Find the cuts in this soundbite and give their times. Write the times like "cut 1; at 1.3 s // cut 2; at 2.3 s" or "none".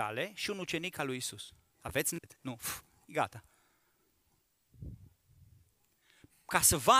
cut 1; at 1.7 s